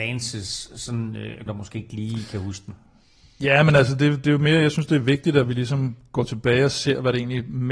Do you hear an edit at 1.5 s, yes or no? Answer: yes